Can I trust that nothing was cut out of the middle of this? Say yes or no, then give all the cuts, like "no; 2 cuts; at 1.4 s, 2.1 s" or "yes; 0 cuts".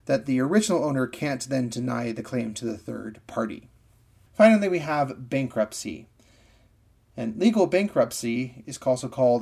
yes; 0 cuts